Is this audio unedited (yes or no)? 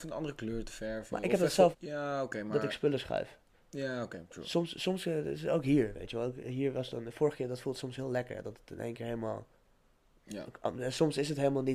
no